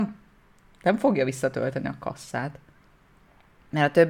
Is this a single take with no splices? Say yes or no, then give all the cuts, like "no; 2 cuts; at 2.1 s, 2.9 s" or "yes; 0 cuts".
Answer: yes; 0 cuts